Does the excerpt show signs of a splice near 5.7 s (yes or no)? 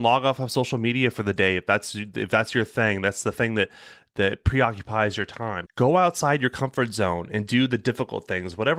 yes